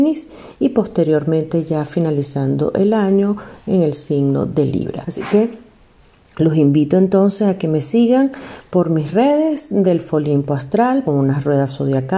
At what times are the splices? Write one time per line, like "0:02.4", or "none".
0:05.0
0:11.0